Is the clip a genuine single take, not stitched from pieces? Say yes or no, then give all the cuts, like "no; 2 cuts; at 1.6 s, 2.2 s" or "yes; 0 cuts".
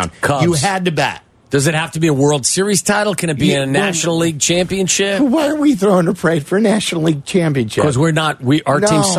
yes; 0 cuts